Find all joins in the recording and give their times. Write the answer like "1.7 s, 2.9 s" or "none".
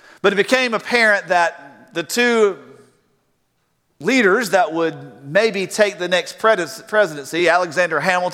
none